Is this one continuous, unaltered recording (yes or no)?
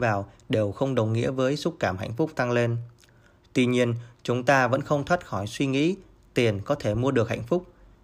no